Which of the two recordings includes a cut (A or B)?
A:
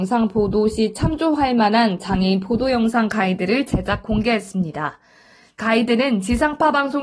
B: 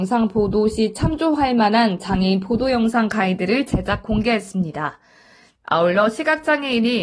B